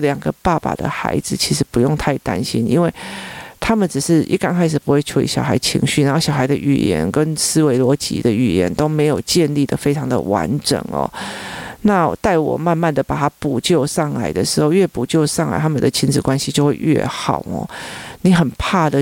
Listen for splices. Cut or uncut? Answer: uncut